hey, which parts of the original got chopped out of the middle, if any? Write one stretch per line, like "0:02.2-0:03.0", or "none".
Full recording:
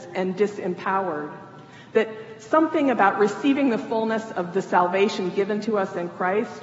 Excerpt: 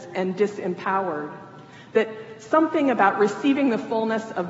none

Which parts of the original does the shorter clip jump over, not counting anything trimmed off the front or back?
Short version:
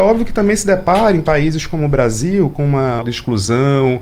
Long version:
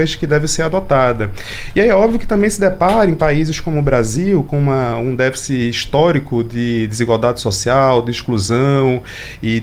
0:05.0-0:08.0

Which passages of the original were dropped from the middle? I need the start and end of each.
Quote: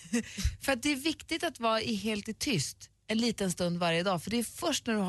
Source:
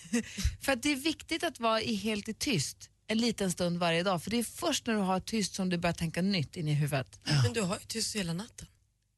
none

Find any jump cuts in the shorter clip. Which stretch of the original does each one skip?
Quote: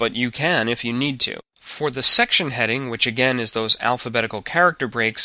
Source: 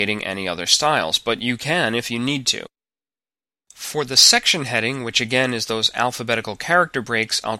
0:02.8-0:03.6

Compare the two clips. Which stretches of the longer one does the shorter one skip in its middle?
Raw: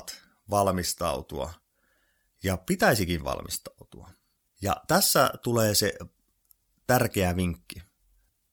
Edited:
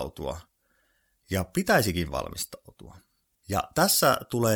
none

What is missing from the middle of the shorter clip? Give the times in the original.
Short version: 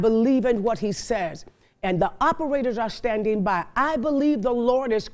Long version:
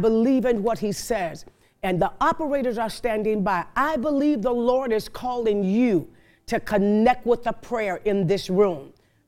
none

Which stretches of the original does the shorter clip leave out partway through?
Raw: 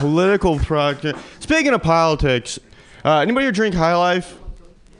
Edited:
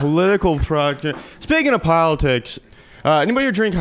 none

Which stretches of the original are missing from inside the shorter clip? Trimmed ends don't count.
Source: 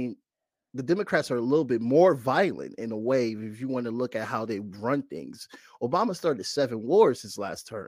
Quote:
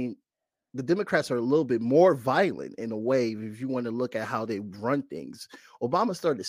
none

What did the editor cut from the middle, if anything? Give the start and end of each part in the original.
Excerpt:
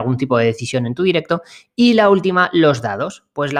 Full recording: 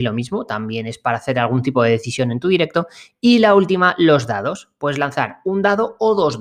none

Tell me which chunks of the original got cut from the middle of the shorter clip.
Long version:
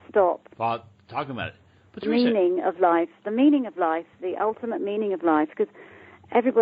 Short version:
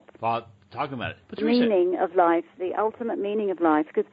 0:01.6-0:01.9
0:03.2-0:04.1

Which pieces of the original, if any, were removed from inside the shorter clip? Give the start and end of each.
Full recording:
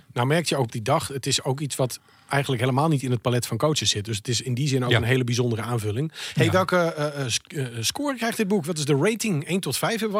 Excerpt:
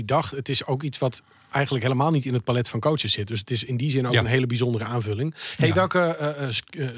none

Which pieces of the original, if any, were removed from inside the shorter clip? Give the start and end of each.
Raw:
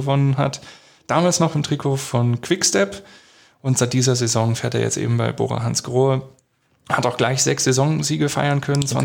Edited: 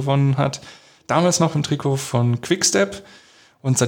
none

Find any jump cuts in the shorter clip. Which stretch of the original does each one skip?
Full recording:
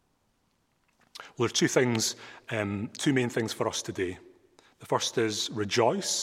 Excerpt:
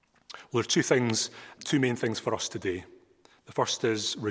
0:02.4-0:02.9

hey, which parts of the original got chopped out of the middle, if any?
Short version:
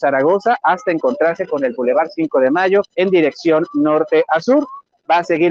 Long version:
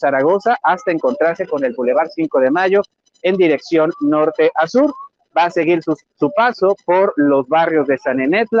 0:02.9-0:03.2

